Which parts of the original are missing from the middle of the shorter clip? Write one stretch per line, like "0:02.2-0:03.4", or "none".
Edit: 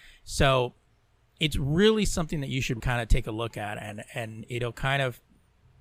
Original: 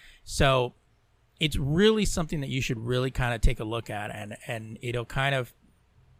0:02.8-0:03.1